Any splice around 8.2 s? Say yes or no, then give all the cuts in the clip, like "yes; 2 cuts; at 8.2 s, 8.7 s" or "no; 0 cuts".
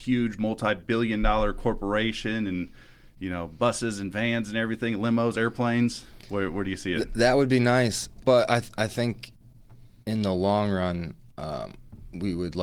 yes; 1 cut; at 8.2 s